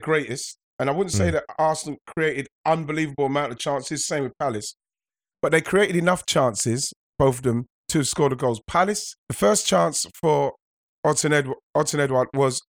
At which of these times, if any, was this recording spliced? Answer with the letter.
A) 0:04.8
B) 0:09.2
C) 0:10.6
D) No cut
B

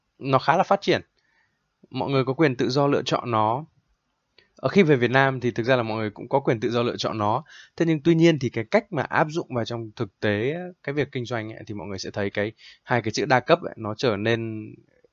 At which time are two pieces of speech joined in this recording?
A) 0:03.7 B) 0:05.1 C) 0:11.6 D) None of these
D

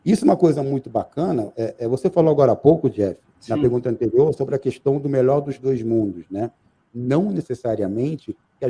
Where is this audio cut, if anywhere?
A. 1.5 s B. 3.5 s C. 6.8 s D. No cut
C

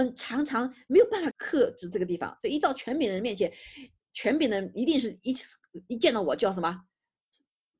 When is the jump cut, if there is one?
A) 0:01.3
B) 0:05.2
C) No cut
A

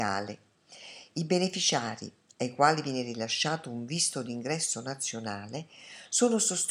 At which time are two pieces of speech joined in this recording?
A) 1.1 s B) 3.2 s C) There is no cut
C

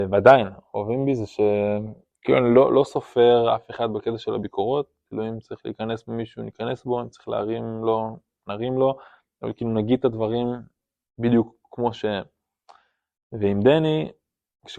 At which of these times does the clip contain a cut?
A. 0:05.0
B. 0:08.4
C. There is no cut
C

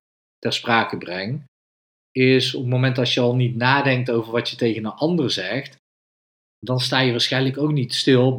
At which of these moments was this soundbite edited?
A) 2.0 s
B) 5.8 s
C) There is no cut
C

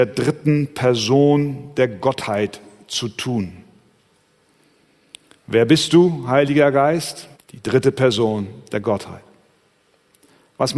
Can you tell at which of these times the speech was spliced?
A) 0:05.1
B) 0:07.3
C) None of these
B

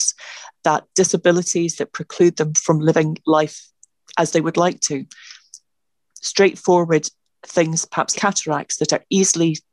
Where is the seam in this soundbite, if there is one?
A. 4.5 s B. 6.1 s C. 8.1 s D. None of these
C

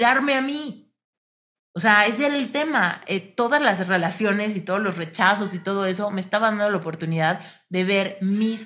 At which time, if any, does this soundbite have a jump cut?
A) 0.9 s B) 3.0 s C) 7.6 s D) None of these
D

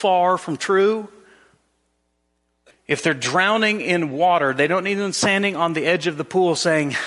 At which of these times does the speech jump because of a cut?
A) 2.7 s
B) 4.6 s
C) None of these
A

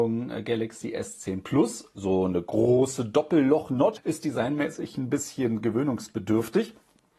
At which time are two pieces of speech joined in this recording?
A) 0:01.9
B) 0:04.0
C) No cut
B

